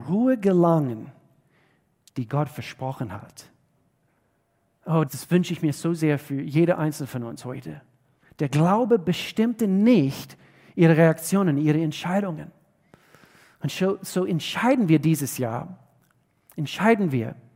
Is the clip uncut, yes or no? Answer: no